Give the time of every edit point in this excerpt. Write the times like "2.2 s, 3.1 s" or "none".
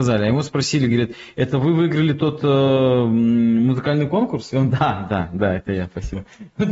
none